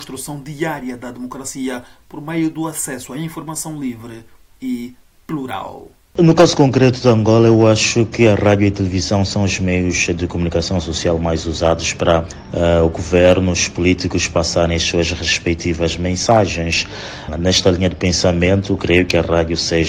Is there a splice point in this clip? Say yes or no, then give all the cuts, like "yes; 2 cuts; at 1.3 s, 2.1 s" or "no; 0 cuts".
no; 0 cuts